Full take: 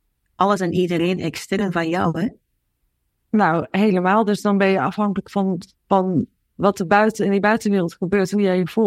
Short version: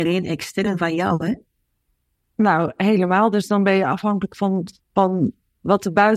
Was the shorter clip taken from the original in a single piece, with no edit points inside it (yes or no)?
yes